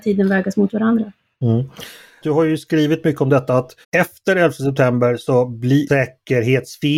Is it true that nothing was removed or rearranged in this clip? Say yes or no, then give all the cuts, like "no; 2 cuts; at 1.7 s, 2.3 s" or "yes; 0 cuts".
no; 3 cuts; at 2.2 s, 3.8 s, 5.9 s